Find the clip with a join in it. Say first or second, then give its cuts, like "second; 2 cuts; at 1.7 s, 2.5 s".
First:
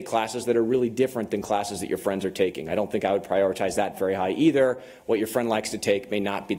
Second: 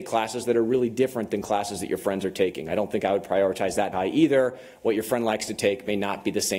second; 1 cut; at 3.9 s